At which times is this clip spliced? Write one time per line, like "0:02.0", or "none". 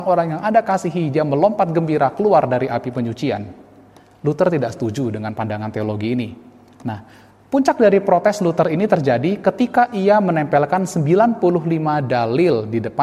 none